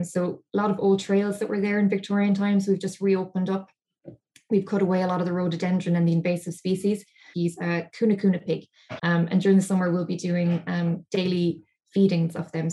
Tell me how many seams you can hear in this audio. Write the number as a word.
two